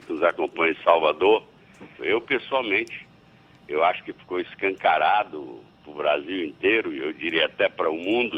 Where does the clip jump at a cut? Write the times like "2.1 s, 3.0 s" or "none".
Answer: 2.0 s

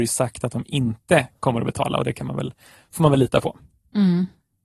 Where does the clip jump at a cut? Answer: none

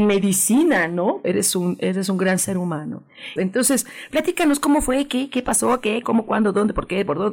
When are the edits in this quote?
1.2 s, 3.4 s

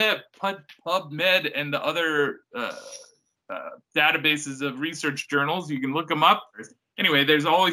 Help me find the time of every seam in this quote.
6.5 s

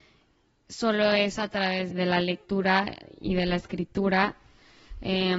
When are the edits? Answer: 1.9 s

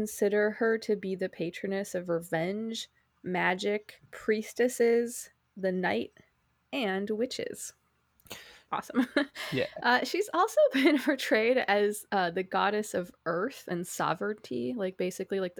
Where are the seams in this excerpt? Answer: 8.7 s

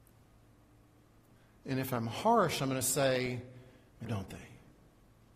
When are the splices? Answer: 4.0 s

